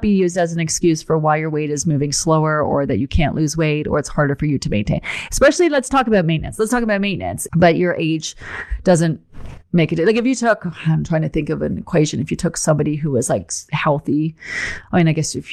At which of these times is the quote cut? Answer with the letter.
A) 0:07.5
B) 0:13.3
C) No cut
A